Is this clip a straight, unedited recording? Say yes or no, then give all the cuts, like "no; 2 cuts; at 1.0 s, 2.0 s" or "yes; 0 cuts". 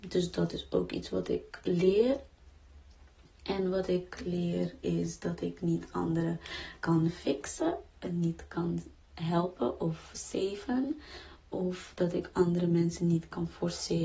yes; 0 cuts